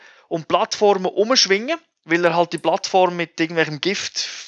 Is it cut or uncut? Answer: uncut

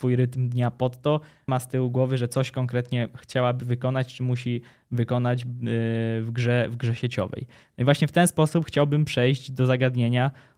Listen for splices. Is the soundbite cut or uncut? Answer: cut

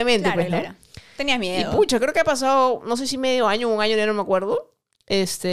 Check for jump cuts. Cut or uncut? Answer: uncut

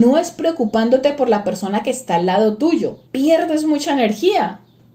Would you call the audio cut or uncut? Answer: cut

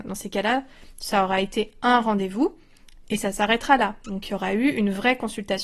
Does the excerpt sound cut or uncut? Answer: uncut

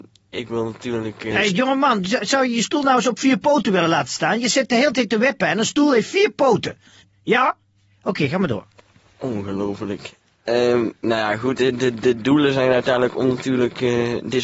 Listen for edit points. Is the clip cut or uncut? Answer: uncut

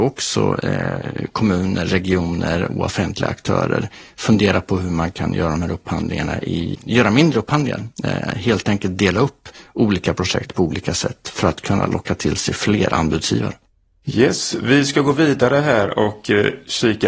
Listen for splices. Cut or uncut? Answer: cut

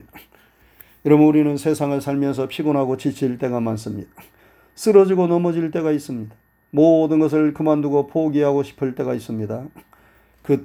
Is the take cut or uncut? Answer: uncut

